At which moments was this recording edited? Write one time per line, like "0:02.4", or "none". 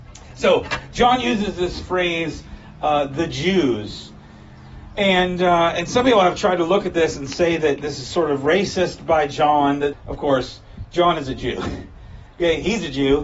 0:09.9